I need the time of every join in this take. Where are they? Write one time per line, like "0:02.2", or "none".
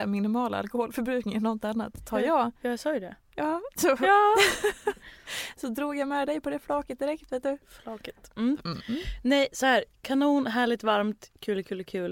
none